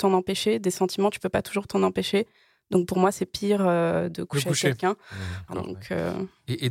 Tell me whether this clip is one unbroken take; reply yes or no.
no